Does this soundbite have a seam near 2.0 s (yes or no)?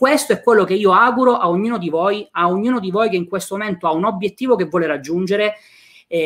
no